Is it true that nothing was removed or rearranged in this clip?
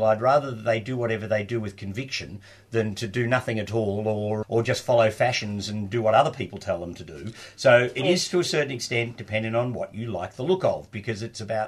no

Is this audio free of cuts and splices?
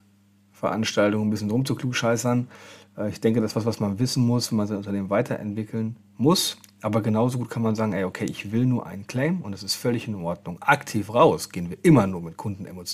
yes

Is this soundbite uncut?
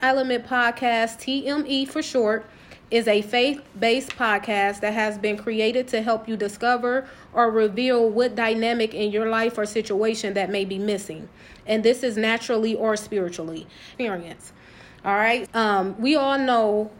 no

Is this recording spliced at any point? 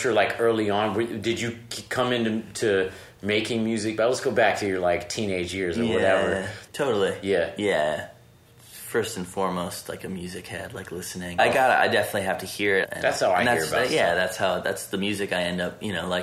yes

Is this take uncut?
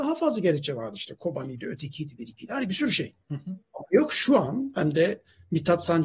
no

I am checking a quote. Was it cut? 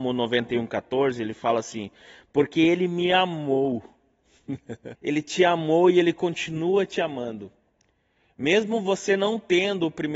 yes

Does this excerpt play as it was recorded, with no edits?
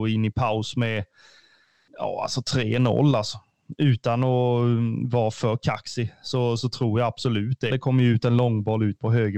no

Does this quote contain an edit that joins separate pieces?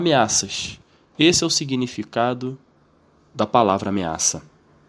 no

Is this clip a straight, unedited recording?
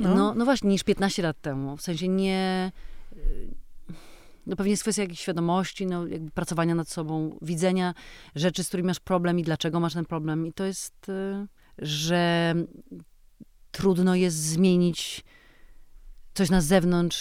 no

